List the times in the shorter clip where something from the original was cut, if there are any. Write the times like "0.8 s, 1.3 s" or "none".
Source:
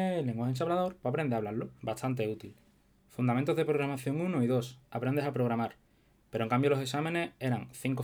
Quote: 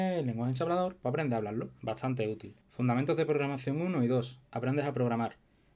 2.6 s